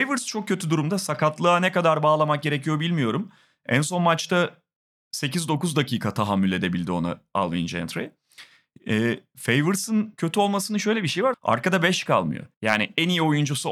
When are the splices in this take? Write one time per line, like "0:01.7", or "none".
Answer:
0:11.3
0:12.5